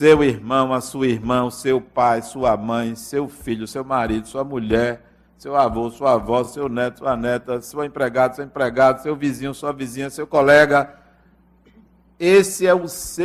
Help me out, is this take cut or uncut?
uncut